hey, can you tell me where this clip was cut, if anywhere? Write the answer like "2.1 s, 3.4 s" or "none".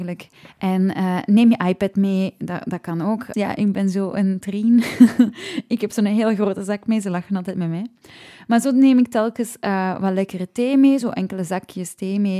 3.3 s